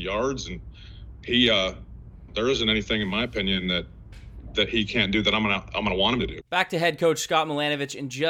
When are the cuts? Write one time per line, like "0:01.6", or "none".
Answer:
0:02.3
0:06.4